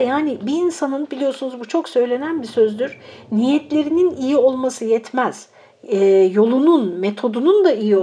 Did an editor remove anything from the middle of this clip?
no; 0 cuts

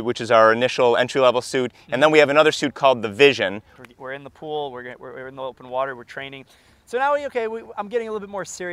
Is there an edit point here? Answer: yes; 1 cut; at 3.8 s

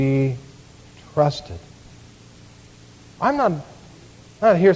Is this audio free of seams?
no; 1 cut; at 3.1 s

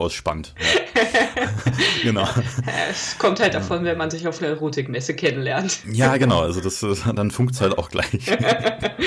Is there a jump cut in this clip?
no; 0 cuts

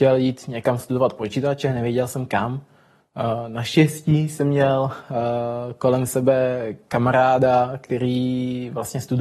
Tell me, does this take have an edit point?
no; 0 cuts

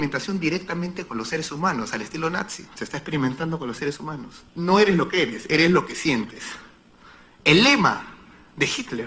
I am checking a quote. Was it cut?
yes; 2 cuts; at 4.5 s, 7.4 s

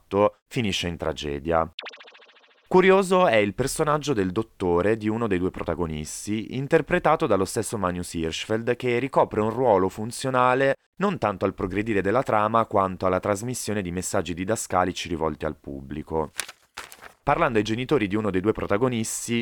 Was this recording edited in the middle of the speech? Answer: no; 0 cuts

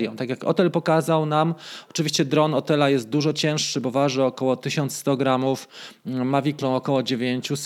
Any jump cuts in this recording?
yes; 1 cut; at 6.6 s

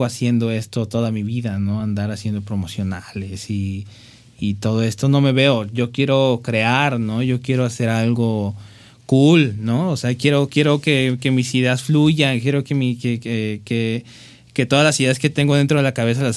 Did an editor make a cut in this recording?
no; 0 cuts

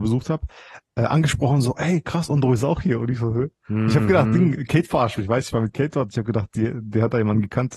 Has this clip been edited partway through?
no; 0 cuts

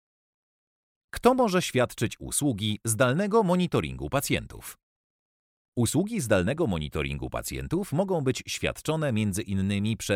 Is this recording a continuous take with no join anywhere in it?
yes; 0 cuts

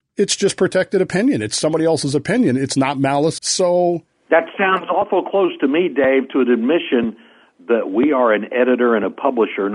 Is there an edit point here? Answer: yes; 1 cut; at 3.4 s

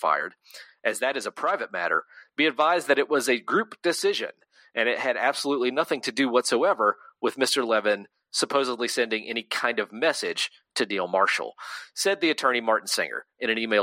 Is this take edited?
no; 0 cuts

